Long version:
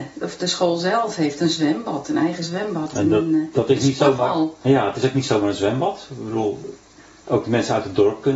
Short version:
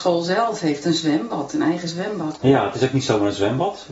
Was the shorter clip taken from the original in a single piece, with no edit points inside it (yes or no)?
no